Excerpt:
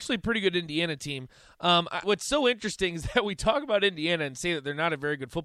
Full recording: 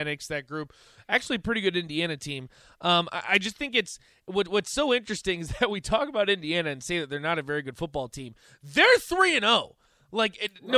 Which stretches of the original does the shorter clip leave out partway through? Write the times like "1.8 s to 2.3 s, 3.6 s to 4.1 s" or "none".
3.2 s to 4.5 s